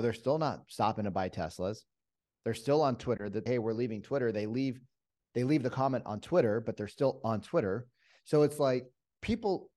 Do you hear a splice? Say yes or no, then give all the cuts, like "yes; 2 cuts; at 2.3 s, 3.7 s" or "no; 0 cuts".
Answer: yes; 1 cut; at 3.5 s